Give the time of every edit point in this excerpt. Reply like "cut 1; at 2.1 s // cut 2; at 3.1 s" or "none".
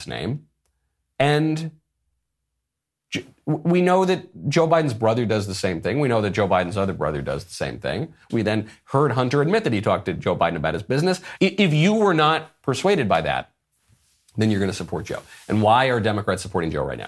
cut 1; at 8.3 s // cut 2; at 11.4 s

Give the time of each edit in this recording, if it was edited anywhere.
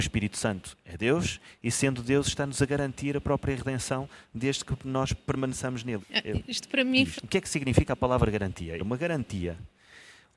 cut 1; at 6.0 s // cut 2; at 7.2 s // cut 3; at 8.8 s

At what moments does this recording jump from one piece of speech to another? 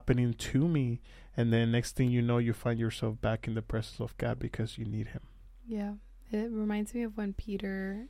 none

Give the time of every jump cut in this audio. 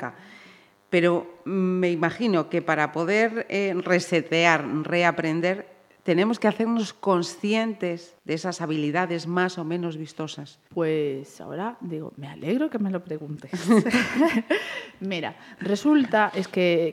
none

